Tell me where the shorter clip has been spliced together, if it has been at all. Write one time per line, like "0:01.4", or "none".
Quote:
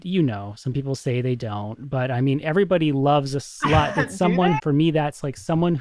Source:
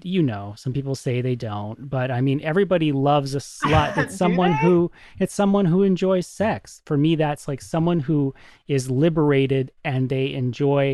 0:04.6